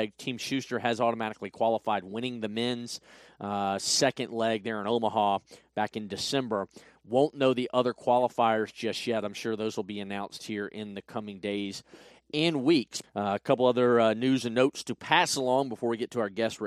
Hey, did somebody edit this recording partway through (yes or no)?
yes